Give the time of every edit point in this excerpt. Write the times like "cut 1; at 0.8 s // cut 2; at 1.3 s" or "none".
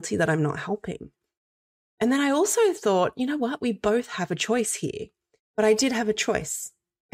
cut 1; at 5.5 s